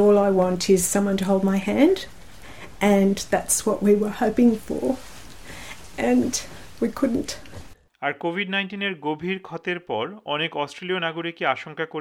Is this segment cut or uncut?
uncut